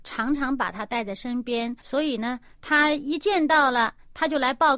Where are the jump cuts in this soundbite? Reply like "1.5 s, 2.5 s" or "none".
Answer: 1.8 s